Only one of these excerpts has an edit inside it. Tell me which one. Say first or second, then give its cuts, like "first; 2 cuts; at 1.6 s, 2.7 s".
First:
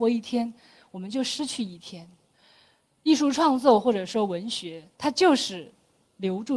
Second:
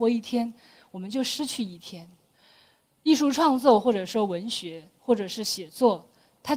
first; 1 cut; at 4.9 s